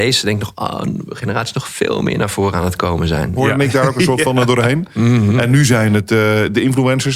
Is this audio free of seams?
no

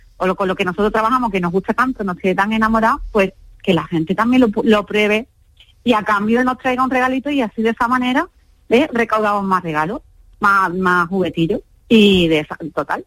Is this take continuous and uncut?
yes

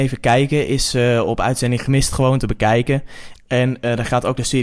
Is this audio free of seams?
no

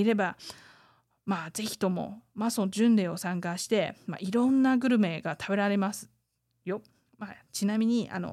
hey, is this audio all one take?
yes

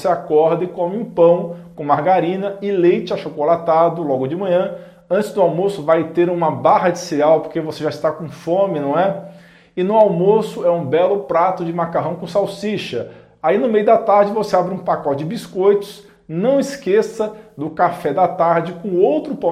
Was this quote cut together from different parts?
no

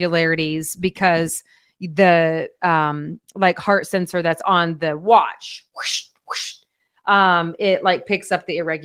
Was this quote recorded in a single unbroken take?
yes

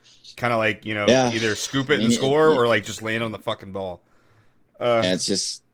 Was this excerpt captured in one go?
yes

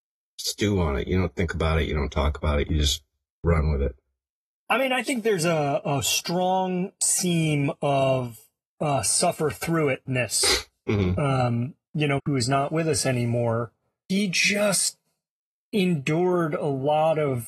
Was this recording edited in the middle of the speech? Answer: yes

